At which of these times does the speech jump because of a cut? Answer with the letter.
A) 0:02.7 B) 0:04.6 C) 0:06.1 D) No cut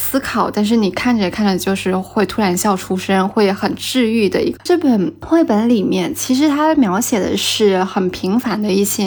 B